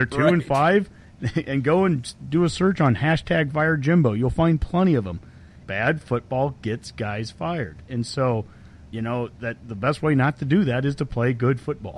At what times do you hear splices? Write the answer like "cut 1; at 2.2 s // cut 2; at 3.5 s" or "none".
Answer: cut 1; at 5.6 s // cut 2; at 8.9 s